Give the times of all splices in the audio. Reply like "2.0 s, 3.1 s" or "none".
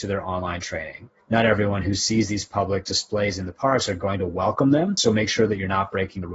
1.2 s